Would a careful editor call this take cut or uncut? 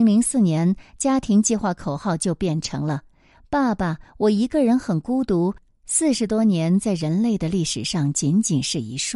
cut